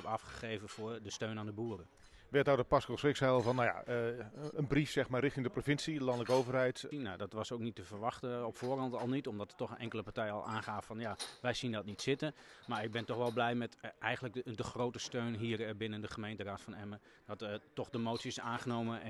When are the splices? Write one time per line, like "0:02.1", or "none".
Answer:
0:04.5
0:06.9